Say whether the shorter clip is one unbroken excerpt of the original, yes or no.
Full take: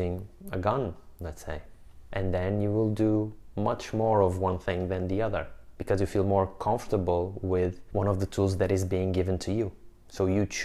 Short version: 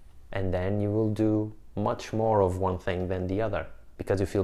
yes